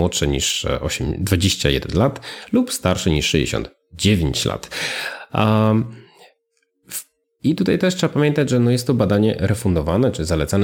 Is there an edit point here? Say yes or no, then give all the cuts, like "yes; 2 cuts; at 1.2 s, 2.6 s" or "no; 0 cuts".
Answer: yes; 1 cut; at 7.2 s